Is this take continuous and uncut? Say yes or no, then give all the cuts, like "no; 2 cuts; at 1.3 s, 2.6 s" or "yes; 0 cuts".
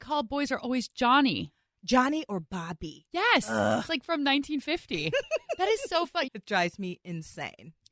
no; 1 cut; at 6.3 s